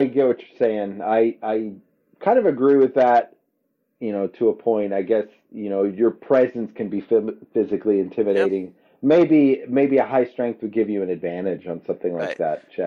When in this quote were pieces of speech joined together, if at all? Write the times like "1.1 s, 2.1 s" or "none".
none